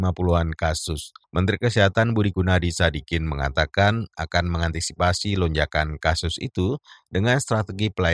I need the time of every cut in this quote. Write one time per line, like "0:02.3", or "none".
0:01.2